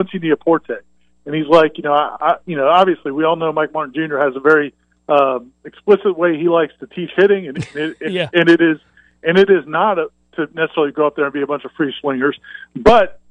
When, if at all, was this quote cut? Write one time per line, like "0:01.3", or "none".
none